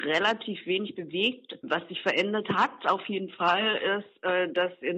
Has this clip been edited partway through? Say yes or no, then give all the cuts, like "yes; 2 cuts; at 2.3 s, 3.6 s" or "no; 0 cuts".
yes; 1 cut; at 1.6 s